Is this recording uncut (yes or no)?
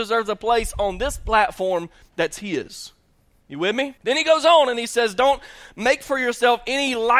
no